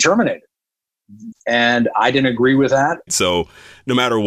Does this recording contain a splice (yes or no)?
yes